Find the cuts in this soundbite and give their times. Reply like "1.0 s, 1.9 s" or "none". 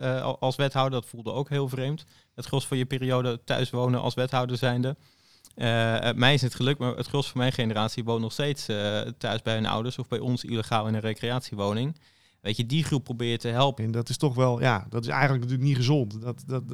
13.8 s